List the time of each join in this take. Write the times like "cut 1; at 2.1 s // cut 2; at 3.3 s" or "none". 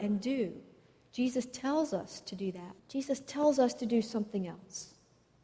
cut 1; at 2.8 s